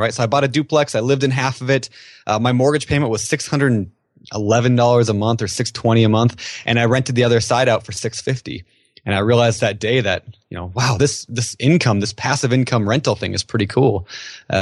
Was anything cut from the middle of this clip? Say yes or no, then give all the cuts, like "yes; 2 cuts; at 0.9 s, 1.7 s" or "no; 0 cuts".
no; 0 cuts